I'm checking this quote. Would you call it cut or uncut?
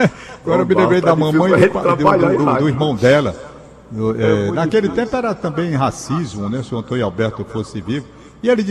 uncut